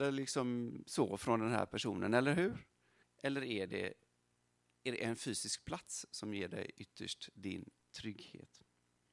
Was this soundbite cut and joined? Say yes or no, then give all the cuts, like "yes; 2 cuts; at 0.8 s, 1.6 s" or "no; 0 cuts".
yes; 2 cuts; at 3.0 s, 7.9 s